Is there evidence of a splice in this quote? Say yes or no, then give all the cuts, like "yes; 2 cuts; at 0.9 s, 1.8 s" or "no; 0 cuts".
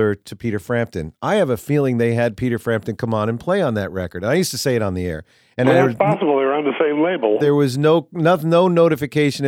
no; 0 cuts